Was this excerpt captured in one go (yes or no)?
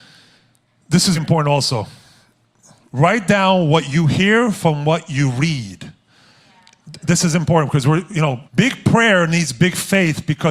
no